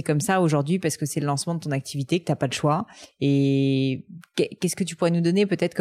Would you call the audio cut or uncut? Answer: uncut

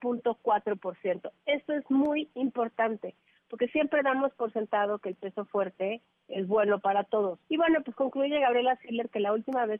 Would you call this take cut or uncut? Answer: cut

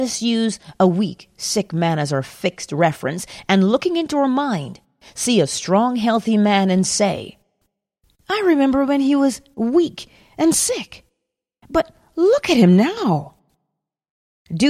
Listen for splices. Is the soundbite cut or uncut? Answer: uncut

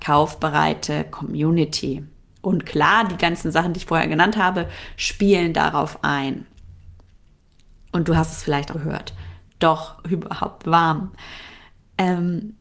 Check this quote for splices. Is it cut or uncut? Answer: cut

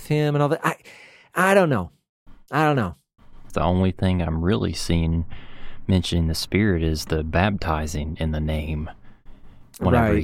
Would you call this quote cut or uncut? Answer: cut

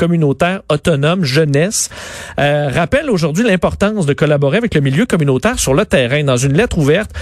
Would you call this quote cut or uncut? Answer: uncut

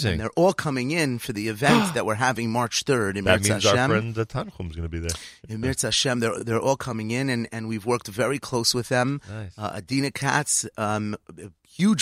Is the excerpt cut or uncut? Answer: uncut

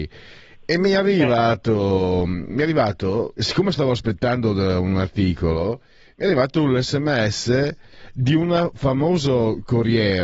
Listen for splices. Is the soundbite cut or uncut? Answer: uncut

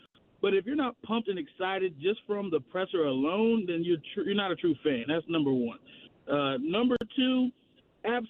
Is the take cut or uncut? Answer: uncut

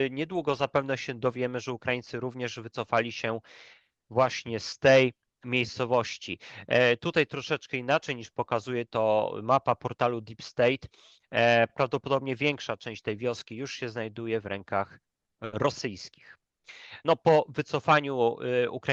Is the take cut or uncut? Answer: uncut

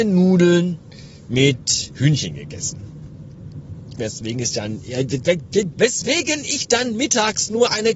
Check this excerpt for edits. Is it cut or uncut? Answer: cut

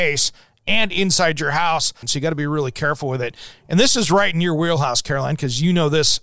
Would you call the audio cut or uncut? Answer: cut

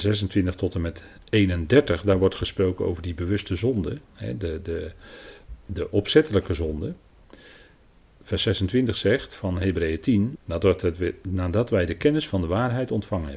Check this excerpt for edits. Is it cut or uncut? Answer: cut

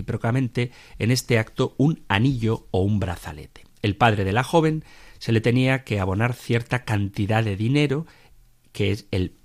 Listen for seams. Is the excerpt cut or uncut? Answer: uncut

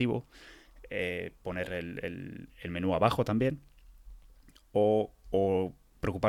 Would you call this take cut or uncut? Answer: uncut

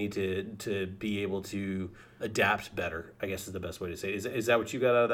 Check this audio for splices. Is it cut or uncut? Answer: cut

